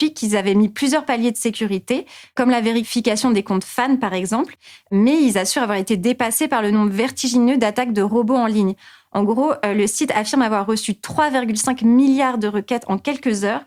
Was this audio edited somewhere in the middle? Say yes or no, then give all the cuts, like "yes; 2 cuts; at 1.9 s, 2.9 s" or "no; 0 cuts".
no; 0 cuts